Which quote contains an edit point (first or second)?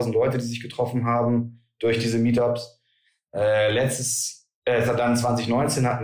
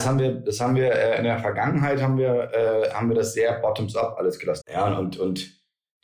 second